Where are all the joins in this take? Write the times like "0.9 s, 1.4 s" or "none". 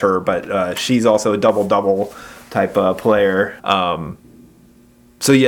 3.6 s